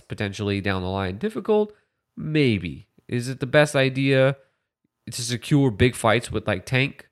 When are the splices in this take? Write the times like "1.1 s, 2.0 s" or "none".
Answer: none